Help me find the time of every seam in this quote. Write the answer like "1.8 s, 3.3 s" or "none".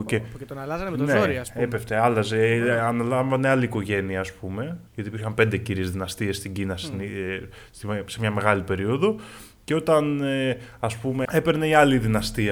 4.9 s, 11.3 s